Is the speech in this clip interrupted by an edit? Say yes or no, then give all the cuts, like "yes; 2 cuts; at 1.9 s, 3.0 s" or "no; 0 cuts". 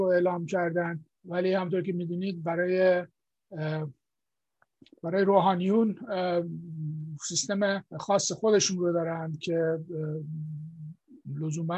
yes; 2 cuts; at 1.1 s, 7.9 s